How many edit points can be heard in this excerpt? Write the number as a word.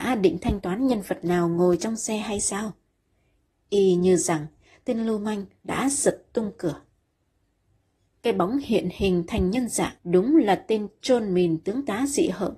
two